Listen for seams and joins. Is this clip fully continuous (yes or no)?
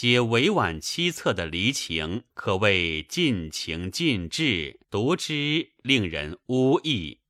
no